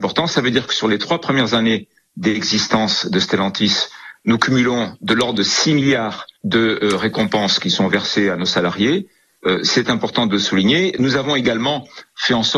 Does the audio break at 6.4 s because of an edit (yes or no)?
yes